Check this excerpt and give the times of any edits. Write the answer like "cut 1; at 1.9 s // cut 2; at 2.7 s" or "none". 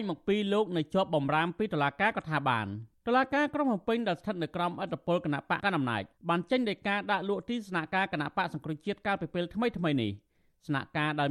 cut 1; at 5.6 s

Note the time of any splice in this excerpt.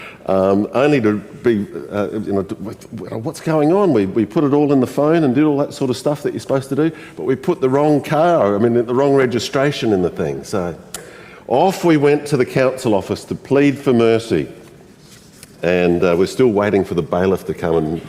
cut 1; at 15.5 s

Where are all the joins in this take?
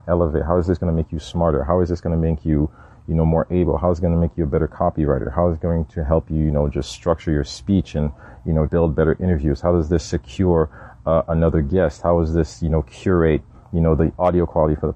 cut 1; at 8.7 s

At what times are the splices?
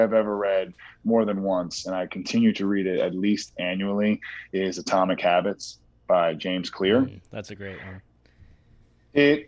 none

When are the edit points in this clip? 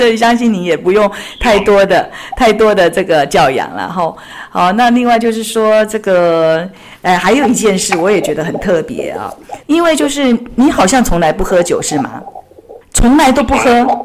cut 1; at 12.8 s

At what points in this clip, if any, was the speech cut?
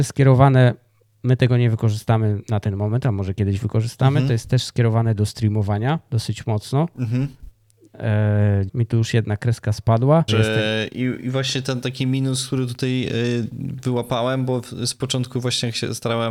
cut 1; at 8.7 s // cut 2; at 10.3 s

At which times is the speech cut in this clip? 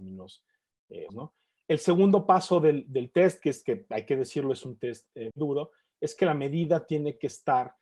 cut 1; at 1.1 s // cut 2; at 5.3 s

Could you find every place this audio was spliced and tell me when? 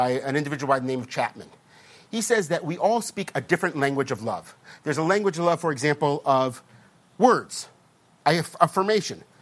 none

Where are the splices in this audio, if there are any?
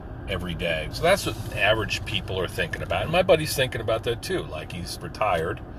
cut 1; at 0.9 s

